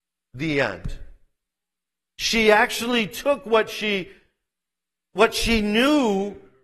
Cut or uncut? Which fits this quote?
uncut